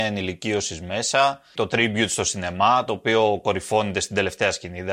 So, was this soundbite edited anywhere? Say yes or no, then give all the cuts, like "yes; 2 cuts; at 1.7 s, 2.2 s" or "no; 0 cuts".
yes; 1 cut; at 1.5 s